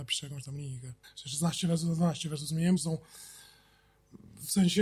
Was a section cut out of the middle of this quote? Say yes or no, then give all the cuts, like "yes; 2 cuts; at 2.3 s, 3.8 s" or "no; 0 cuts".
yes; 2 cuts; at 1.0 s, 2.8 s